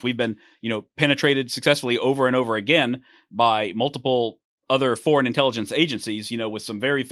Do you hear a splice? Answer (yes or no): no